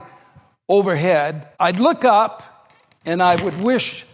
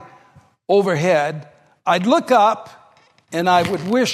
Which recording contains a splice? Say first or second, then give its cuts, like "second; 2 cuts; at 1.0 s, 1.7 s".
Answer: first; 1 cut; at 1.5 s